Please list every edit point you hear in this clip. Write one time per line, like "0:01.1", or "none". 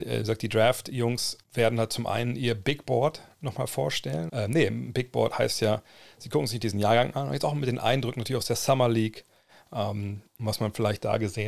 0:01.4
0:04.3